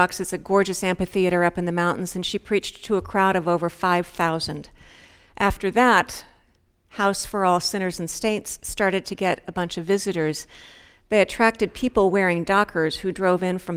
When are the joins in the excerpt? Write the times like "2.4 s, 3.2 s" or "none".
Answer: none